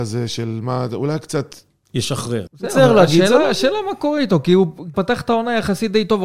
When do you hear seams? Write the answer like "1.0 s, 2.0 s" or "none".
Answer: 2.5 s, 4.9 s

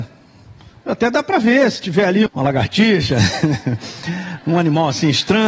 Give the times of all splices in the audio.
2.3 s

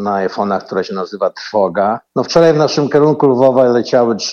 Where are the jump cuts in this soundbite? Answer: 2.1 s

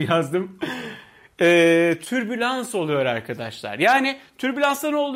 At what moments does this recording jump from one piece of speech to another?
none

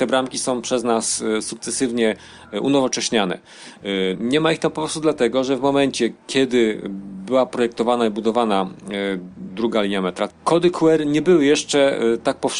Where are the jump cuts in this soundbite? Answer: 4.1 s, 10.3 s

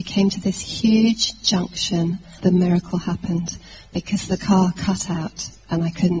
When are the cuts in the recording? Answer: 2.4 s

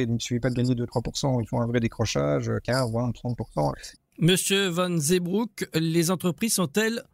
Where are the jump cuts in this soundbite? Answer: 4.0 s

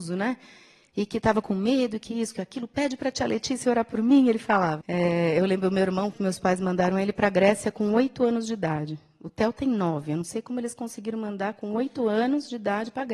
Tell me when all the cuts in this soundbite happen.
4.8 s, 6.1 s

